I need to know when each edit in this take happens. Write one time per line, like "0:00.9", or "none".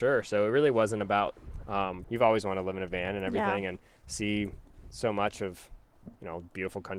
0:02.0